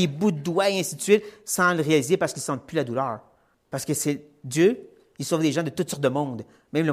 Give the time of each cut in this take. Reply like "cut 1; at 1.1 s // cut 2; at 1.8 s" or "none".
cut 1; at 3.5 s